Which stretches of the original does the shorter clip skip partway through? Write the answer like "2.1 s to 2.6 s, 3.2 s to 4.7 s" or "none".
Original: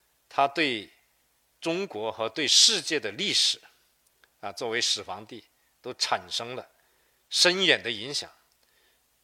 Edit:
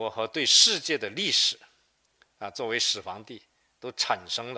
none